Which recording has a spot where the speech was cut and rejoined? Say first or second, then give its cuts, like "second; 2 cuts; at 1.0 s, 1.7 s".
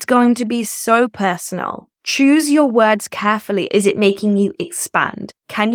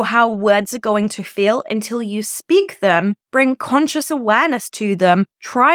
first; 1 cut; at 3.7 s